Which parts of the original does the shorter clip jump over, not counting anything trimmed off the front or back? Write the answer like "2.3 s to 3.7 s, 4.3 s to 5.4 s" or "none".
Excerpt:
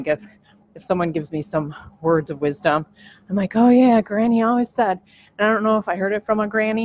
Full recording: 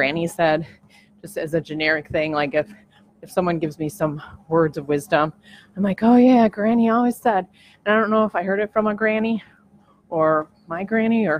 none